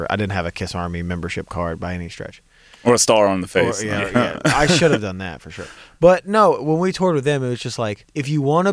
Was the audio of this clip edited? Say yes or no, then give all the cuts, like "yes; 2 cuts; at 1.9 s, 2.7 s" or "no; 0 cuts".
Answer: no; 0 cuts